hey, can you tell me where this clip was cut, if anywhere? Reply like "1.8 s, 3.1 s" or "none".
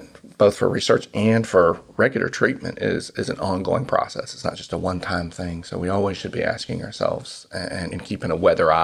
7.9 s